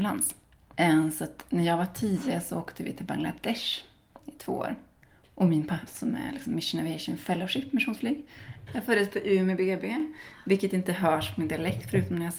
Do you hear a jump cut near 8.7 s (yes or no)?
yes